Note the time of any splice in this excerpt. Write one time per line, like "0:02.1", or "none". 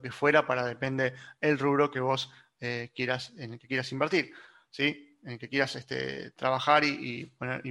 none

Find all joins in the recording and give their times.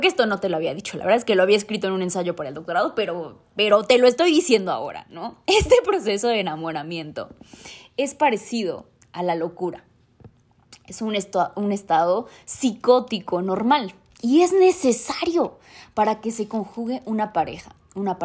none

